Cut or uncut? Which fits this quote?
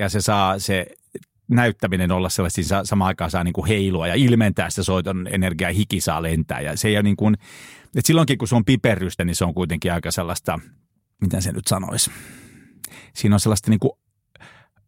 uncut